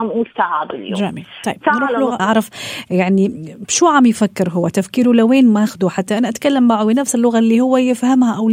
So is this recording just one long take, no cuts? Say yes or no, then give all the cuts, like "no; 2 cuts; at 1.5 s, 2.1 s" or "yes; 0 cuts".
no; 1 cut; at 2.2 s